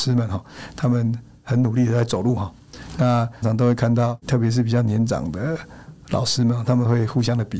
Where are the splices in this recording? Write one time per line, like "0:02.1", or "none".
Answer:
0:03.4